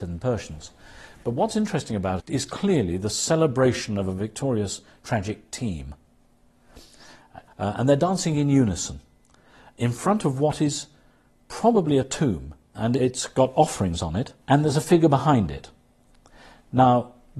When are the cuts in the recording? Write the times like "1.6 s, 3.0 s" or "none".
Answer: 2.2 s, 7.5 s, 14.4 s